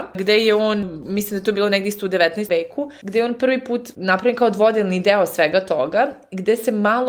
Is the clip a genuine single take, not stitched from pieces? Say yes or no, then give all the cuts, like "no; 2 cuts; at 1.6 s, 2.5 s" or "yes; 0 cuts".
no; 1 cut; at 2.5 s